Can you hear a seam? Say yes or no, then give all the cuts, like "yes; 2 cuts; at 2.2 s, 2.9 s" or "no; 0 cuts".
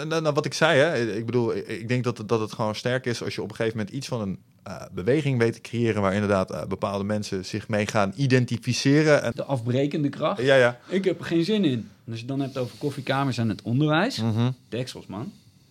yes; 1 cut; at 9.3 s